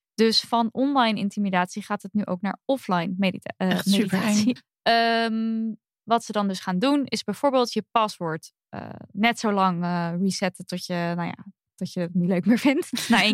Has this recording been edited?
yes; 1 cut; at 4.6 s

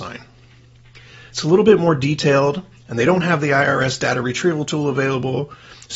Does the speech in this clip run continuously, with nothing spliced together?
no; 1 cut; at 1.3 s

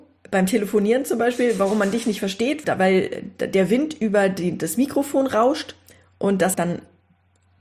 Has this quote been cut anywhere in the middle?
yes; 2 cuts; at 2.6 s, 6.5 s

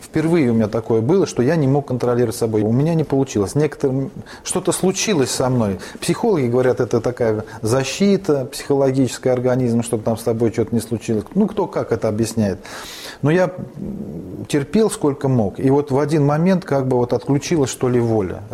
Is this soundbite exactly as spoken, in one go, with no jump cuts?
no; 1 cut; at 2.6 s

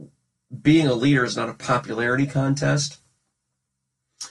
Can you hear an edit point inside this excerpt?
no; 0 cuts

